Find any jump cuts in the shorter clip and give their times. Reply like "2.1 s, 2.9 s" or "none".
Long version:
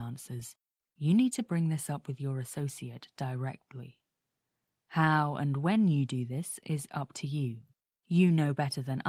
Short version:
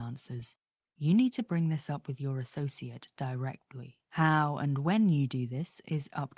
4.0 s